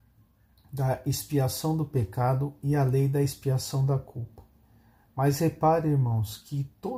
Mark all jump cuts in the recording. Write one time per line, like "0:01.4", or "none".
none